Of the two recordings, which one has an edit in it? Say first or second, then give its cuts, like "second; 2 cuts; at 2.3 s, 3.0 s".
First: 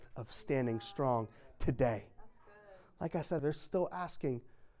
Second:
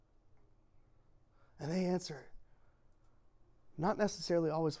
first; 1 cut; at 3.4 s